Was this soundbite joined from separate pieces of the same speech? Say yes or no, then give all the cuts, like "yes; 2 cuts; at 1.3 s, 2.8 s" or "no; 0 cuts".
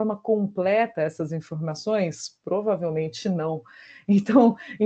no; 0 cuts